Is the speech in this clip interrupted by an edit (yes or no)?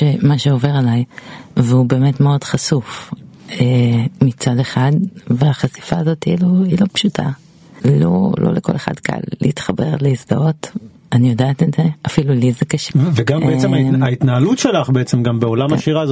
no